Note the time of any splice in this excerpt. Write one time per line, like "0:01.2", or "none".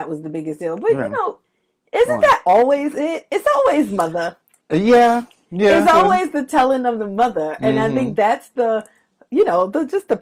none